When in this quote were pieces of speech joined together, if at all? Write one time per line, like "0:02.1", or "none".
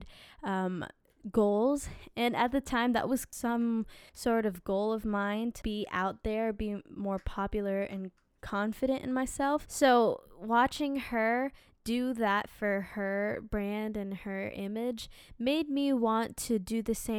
0:02.1
0:05.6